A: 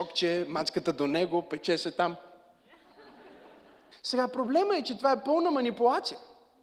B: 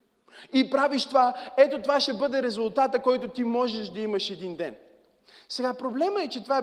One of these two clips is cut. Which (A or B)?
A